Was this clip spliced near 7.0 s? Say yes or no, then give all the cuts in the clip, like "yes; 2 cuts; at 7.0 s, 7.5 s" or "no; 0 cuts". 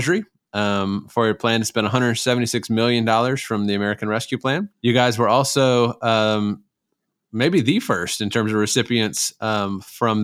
no; 1 cut; at 4.7 s